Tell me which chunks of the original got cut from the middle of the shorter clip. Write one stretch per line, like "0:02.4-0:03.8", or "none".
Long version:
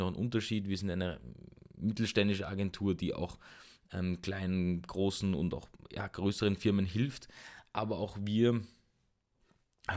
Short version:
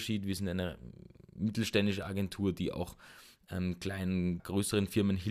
0:04.8-0:06.1